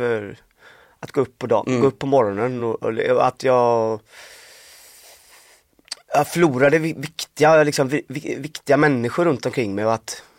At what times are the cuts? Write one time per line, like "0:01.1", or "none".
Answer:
none